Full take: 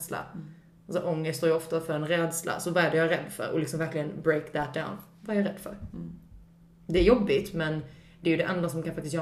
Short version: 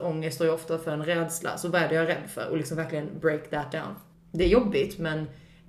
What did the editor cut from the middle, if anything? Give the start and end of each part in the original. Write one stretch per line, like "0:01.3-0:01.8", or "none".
0:05.1-0:06.7